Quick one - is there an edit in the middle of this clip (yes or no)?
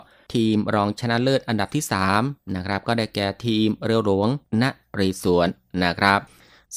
no